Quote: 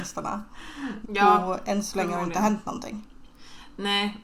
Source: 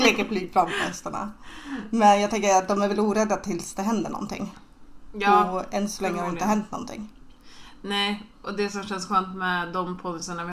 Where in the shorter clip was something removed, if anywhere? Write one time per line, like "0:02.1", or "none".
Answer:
0:01.0